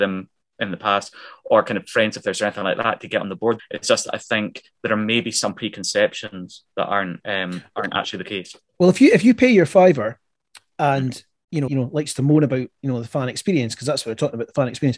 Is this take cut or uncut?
cut